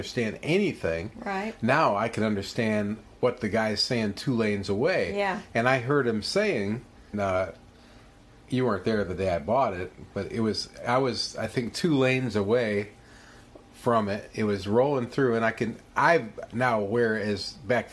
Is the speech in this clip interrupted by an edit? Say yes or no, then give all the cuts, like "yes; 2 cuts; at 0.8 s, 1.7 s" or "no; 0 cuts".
yes; 1 cut; at 7.1 s